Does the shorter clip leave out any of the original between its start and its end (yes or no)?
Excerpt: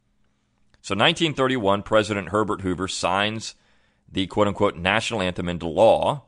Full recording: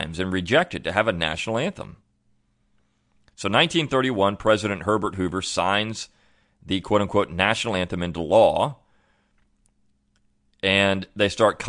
no